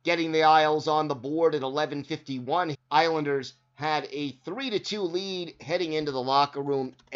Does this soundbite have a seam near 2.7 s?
yes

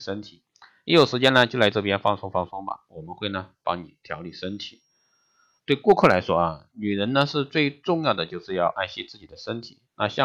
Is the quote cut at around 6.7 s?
yes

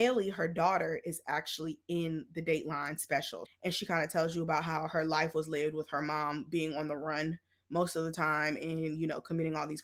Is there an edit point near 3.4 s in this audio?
yes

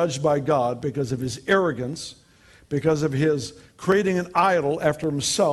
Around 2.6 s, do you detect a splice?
yes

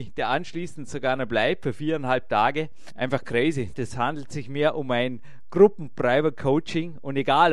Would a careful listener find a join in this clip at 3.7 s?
yes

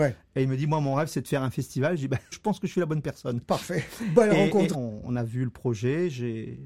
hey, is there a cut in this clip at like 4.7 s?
yes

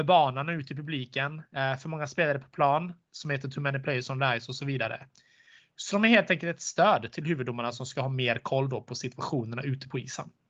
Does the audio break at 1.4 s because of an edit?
no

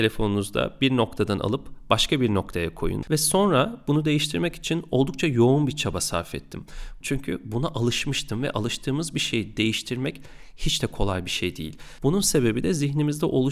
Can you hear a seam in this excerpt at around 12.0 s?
yes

